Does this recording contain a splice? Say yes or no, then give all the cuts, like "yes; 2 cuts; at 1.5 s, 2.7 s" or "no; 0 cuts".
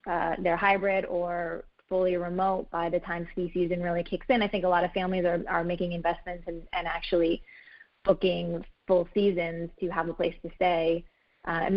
no; 0 cuts